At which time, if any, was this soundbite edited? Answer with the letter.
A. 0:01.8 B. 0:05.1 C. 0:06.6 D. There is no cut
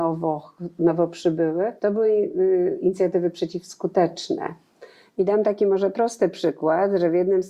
A